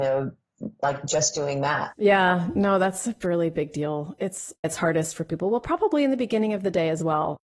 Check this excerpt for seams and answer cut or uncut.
cut